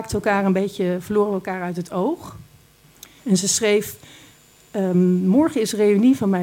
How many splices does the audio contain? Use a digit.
1